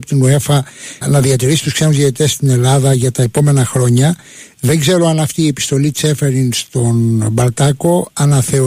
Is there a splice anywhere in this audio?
yes; 1 cut; at 1.0 s

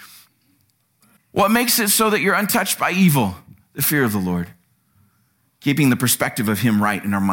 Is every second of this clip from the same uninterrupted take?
no; 1 cut; at 1.2 s

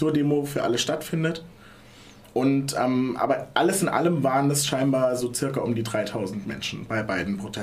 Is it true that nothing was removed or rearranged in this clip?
yes; 0 cuts

